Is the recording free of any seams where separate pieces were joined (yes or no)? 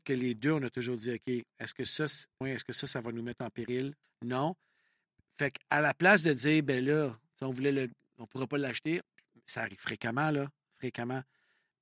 no